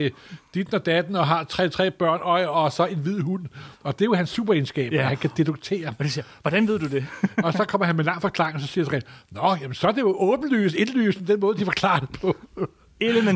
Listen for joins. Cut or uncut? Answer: uncut